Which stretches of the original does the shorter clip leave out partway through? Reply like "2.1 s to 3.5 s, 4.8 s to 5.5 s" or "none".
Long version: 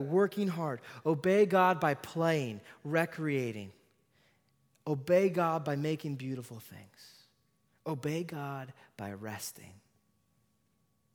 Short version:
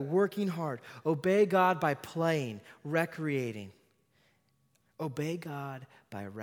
4.8 s to 7.7 s